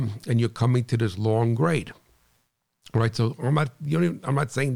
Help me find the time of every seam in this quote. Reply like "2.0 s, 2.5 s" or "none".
none